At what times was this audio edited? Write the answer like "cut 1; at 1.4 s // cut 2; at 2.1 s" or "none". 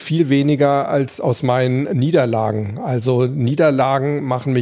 none